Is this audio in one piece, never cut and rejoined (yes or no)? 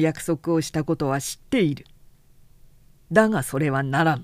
yes